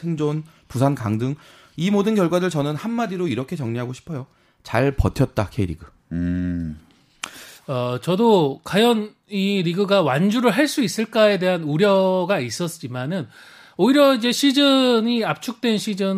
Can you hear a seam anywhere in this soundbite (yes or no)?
yes